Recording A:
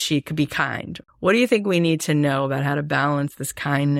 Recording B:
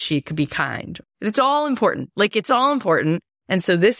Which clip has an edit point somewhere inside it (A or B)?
A